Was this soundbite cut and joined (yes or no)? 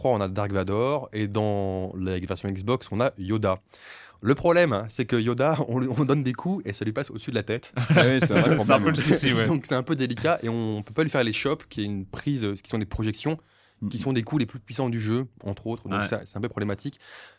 no